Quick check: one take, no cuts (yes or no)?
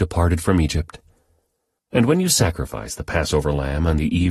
no